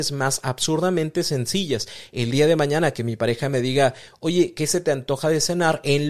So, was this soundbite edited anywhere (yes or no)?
no